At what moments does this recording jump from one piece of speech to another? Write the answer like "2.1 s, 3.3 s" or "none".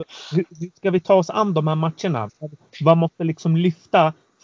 2.3 s